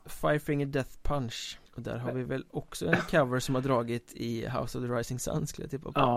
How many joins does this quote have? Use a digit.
1